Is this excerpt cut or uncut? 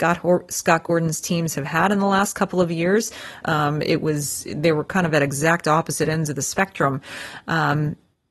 cut